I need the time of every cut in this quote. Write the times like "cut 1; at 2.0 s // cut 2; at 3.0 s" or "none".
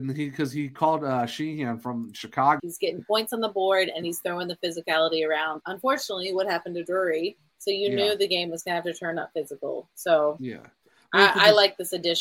cut 1; at 2.6 s // cut 2; at 5.6 s

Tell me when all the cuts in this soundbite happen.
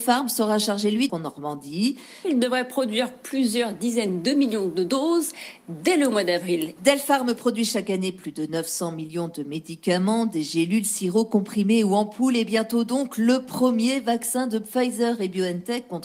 cut 1; at 1.1 s // cut 2; at 2.2 s // cut 3; at 6.8 s

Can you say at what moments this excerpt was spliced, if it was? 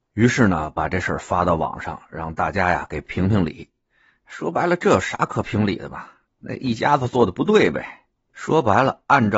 none

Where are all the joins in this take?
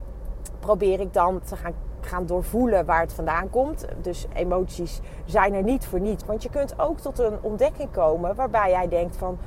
cut 1; at 6.2 s

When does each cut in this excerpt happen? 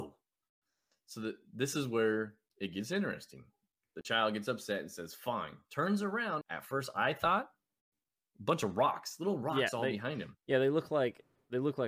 cut 1; at 6.4 s

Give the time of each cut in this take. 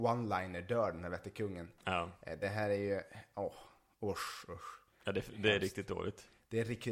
none

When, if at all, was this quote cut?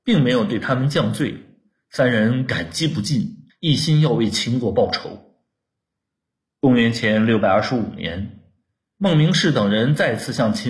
cut 1; at 3.5 s

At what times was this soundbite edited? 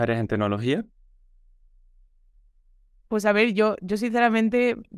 none

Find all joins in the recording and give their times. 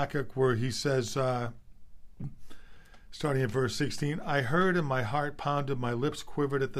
none

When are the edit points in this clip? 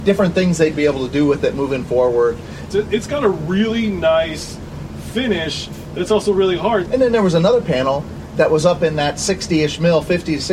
cut 1; at 2.7 s // cut 2; at 6.9 s

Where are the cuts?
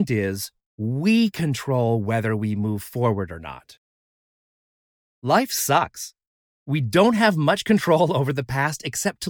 none

